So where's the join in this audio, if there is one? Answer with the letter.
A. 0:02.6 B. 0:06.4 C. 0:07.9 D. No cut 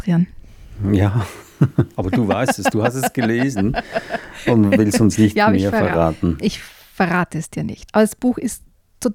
C